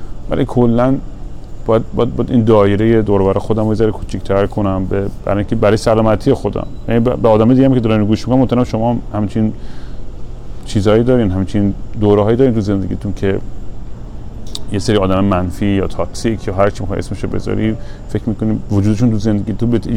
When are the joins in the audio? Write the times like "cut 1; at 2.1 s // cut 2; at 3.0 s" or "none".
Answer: none